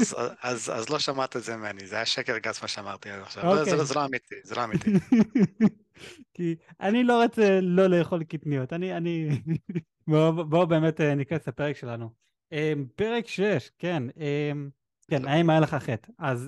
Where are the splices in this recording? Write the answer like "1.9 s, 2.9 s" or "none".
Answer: 10.0 s, 15.1 s